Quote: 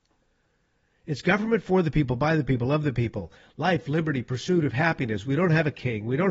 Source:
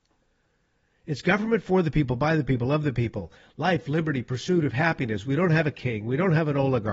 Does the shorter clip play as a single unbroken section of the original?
yes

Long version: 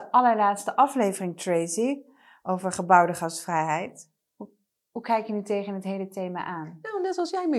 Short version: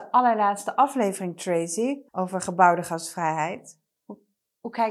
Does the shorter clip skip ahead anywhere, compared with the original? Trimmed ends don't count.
yes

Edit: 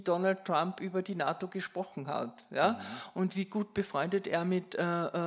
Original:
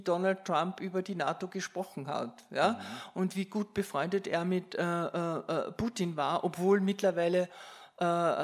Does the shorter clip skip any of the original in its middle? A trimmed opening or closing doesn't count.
no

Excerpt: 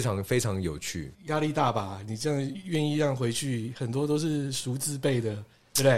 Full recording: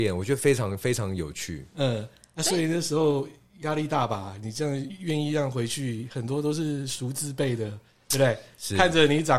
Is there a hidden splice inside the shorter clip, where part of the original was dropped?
yes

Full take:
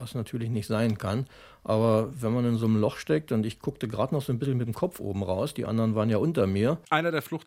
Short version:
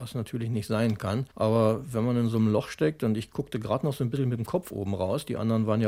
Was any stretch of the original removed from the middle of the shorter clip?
yes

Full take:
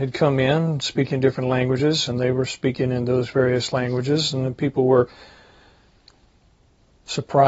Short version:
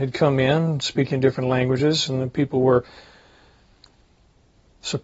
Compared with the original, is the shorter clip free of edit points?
no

